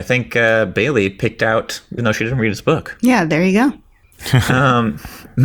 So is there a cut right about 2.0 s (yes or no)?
yes